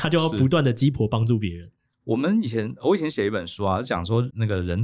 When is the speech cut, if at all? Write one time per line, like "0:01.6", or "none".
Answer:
none

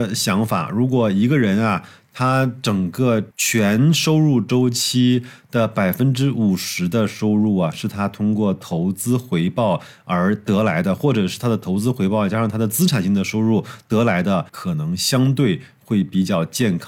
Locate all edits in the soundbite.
0:03.3
0:14.5

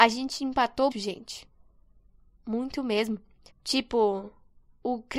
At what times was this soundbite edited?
0:00.9
0:03.5

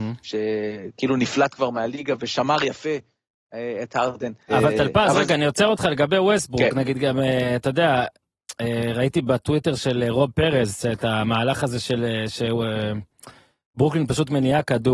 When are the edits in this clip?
0:04.5

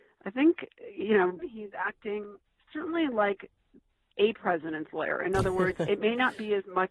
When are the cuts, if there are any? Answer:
0:01.4

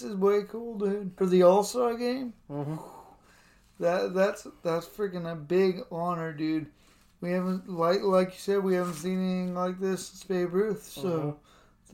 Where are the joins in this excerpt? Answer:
0:01.2

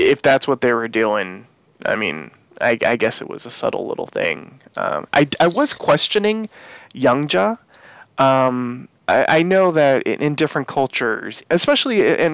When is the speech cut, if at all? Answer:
0:11.4

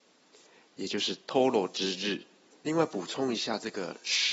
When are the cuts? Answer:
0:02.5

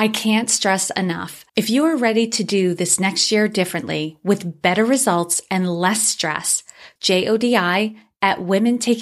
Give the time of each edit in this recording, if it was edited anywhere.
0:01.5
0:07.0

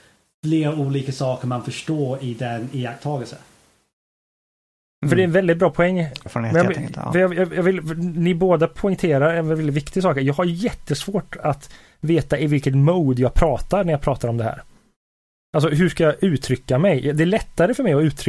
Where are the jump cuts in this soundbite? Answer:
0:06.3

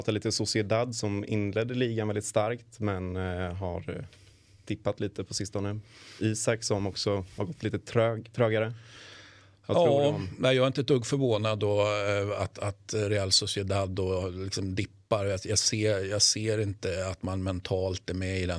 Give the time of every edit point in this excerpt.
none

